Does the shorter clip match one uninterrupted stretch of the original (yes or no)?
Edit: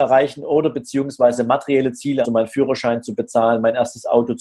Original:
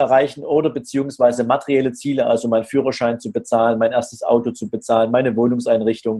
no